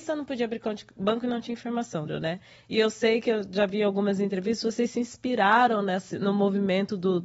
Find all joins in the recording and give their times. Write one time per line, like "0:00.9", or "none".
0:02.1